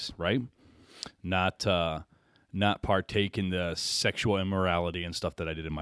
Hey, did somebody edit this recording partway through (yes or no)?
no